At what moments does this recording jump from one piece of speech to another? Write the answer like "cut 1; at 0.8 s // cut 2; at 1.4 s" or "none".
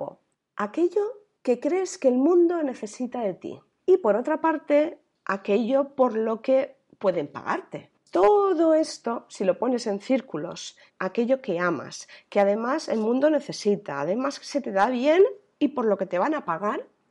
cut 1; at 10.9 s

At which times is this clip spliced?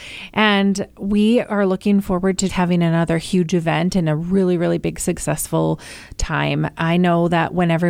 cut 1; at 2.5 s

